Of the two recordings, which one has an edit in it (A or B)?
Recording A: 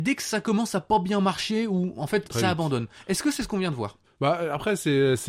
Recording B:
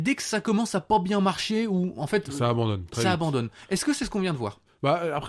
A